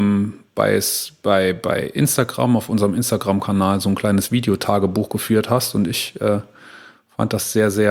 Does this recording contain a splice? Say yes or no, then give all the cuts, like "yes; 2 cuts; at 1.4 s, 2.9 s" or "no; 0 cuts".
no; 0 cuts